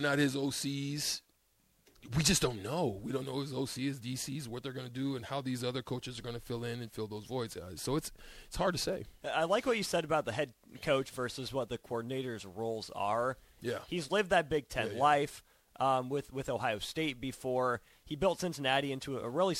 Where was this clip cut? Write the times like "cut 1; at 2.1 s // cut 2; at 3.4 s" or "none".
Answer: cut 1; at 13.6 s